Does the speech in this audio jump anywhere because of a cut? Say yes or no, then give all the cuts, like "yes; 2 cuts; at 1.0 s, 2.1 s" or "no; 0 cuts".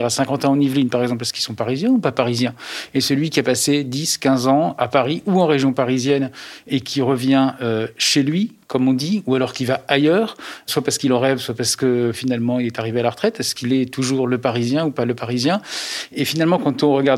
no; 0 cuts